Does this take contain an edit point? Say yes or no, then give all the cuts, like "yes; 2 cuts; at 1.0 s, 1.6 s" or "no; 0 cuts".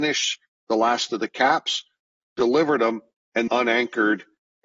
yes; 1 cut; at 3.5 s